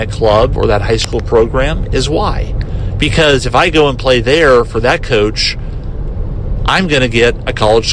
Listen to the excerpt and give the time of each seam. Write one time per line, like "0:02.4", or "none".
none